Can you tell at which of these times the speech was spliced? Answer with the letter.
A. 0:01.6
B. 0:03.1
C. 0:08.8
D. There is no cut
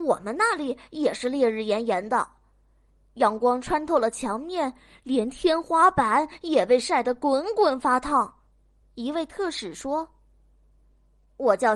C